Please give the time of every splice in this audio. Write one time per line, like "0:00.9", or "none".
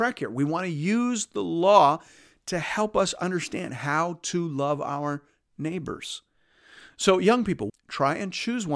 0:07.7